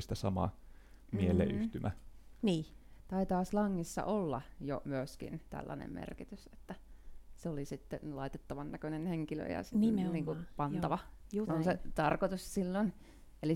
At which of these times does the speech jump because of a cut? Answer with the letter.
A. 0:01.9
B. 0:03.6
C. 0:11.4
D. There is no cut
C